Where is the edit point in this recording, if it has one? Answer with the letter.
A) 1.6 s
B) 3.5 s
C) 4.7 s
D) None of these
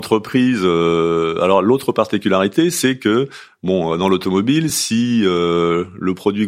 D